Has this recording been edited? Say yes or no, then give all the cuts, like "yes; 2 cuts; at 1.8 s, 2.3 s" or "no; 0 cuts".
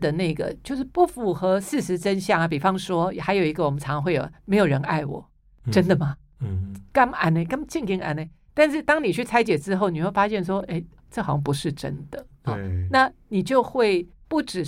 no; 0 cuts